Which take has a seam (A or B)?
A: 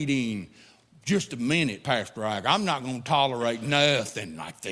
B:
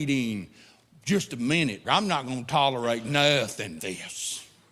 B